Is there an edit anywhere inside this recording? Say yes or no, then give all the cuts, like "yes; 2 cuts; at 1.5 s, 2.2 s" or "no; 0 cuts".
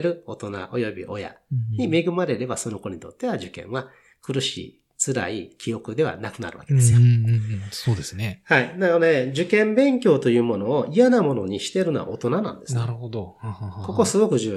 no; 0 cuts